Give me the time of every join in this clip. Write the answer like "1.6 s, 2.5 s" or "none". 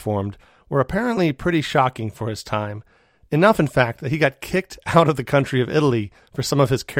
none

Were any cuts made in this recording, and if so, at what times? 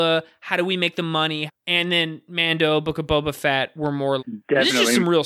1.5 s, 4.2 s

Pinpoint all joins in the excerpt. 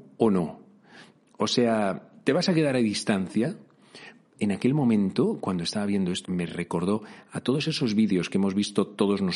4.4 s, 6.2 s

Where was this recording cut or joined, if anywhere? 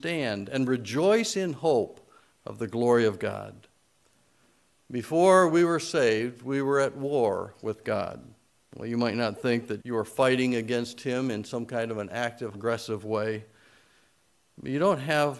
9.8 s, 12.5 s

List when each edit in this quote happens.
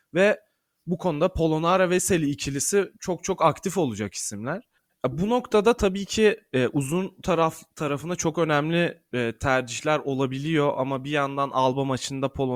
none

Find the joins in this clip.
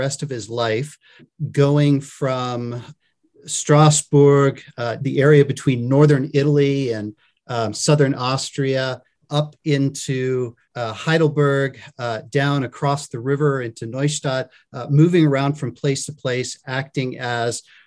5.0 s, 10.6 s

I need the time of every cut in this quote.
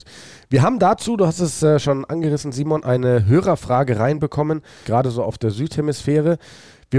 4.8 s

